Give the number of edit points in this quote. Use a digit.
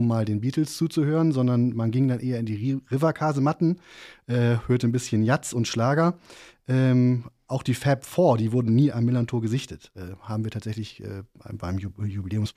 0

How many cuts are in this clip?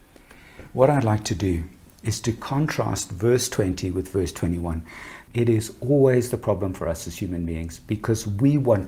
1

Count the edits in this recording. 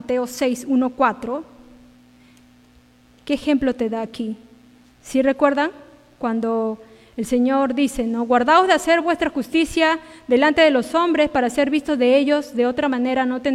1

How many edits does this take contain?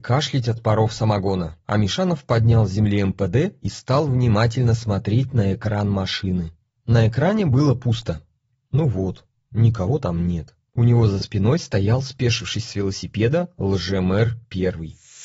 1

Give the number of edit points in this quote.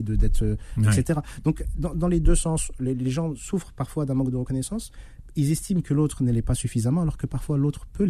0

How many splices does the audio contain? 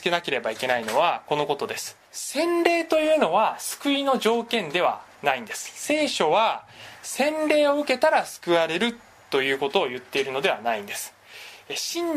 1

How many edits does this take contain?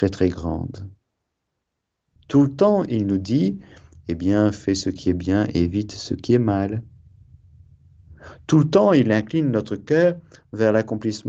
1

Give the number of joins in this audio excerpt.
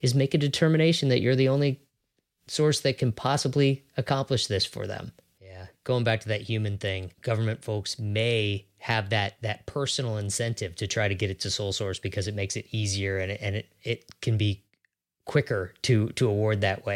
2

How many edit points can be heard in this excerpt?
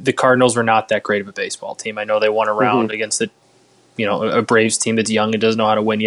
0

